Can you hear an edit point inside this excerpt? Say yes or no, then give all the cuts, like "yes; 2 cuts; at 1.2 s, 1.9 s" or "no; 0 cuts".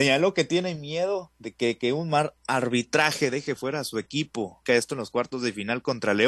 yes; 1 cut; at 4.7 s